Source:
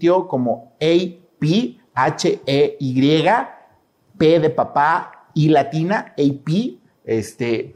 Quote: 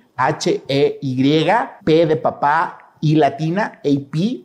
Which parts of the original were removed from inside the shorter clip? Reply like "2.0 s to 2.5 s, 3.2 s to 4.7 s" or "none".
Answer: 3.6 s to 4.1 s